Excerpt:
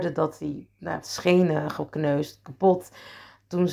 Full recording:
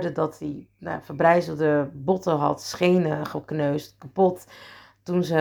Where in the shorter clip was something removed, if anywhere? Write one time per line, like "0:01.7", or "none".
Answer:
0:01.0